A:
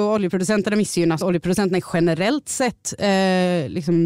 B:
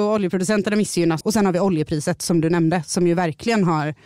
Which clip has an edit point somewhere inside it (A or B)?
B